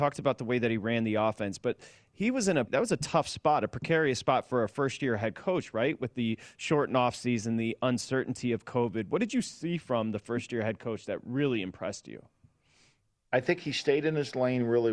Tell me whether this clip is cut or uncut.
cut